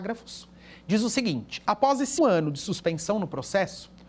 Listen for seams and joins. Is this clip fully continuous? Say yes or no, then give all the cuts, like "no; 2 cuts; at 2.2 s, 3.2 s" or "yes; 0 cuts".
no; 1 cut; at 2.2 s